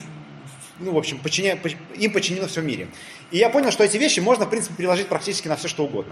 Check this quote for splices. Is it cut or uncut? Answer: uncut